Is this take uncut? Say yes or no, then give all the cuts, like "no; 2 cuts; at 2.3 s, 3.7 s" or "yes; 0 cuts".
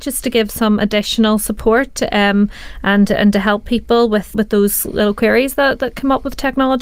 no; 1 cut; at 4.3 s